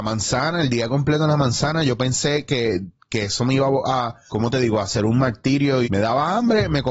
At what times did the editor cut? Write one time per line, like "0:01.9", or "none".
0:04.3
0:05.8